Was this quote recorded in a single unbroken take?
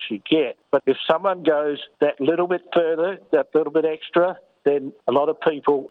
yes; 0 cuts

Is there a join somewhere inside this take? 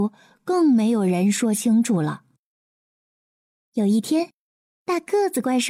no; 0 cuts

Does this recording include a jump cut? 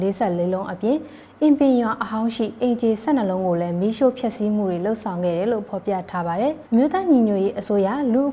yes; 1 cut; at 6.7 s

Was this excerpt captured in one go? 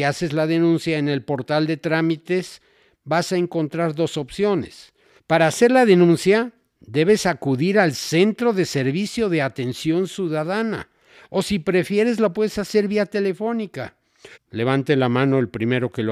no; 2 cuts; at 5.2 s, 14.3 s

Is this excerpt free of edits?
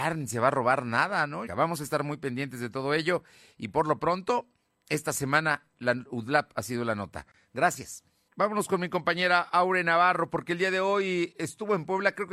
no; 2 cuts; at 1.5 s, 8.3 s

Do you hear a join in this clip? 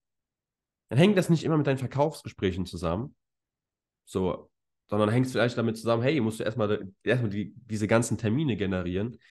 no; 0 cuts

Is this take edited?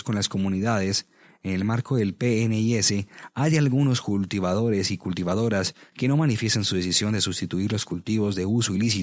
no; 0 cuts

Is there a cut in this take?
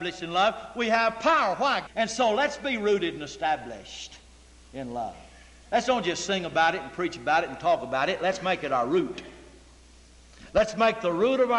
yes; 1 cut; at 1.9 s

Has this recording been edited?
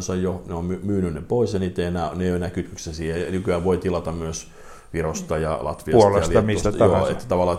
no; 0 cuts

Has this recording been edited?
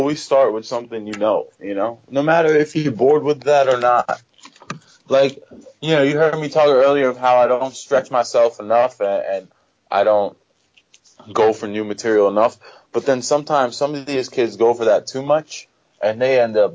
no; 0 cuts

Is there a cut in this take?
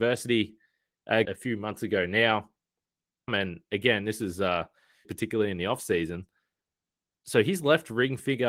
yes; 3 cuts; at 1.2 s, 3.3 s, 5.0 s

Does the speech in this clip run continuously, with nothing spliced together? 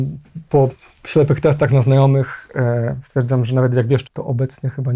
no; 1 cut; at 4.0 s

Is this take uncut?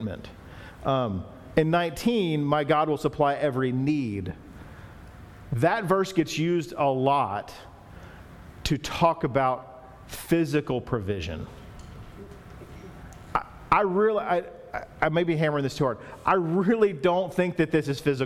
yes; 0 cuts

